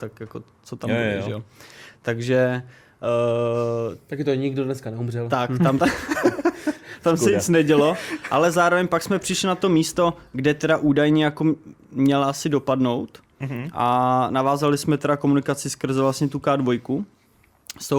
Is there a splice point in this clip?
yes; 1 cut; at 5.8 s

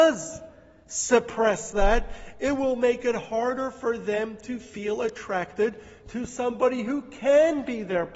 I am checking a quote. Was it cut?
no; 0 cuts

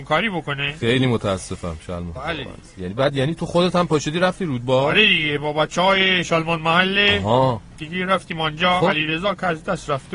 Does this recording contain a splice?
yes; 1 cut; at 2.1 s

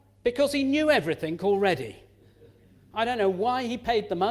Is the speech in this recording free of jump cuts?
yes; 0 cuts

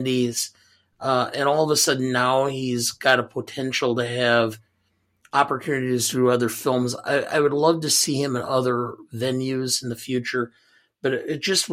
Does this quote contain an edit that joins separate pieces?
no; 0 cuts

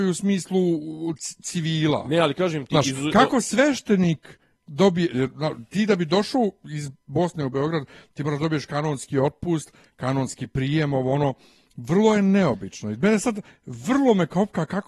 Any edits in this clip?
no; 0 cuts

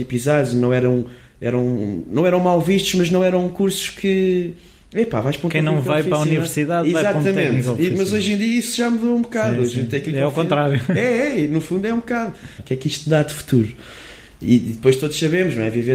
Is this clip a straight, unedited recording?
no; 1 cut; at 12.6 s

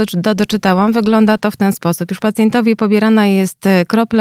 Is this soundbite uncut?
yes; 0 cuts

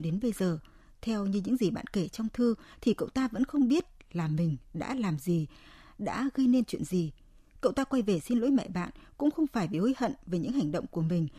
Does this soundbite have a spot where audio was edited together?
no; 0 cuts

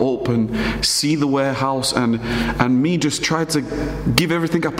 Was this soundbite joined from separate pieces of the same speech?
no; 0 cuts

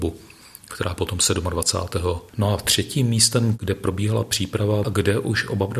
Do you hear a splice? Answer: yes; 2 cuts; at 2.3 s, 4.8 s

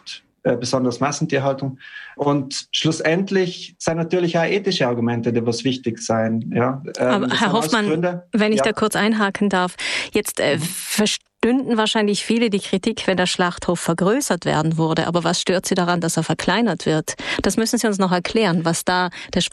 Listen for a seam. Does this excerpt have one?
no; 0 cuts

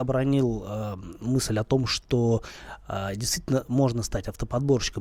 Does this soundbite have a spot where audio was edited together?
no; 0 cuts

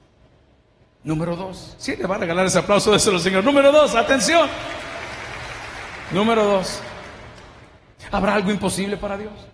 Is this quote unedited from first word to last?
yes; 0 cuts

